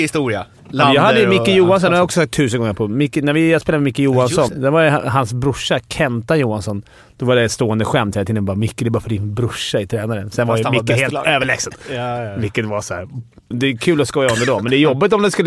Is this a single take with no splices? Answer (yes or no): no